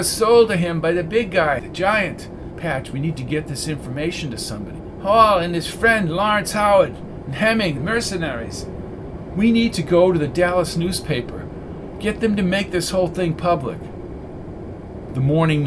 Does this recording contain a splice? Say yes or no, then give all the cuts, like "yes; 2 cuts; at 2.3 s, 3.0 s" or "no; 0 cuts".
yes; 2 cuts; at 1.6 s, 7.8 s